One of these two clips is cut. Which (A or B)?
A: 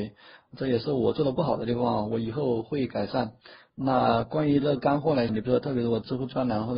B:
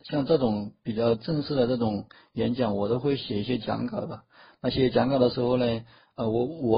A